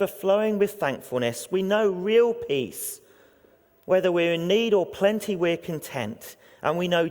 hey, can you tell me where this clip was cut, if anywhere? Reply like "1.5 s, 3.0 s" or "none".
none